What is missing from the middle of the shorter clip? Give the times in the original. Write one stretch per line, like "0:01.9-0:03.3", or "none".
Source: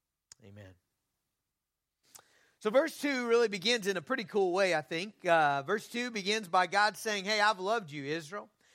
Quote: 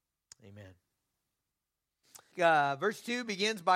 0:02.3-0:05.2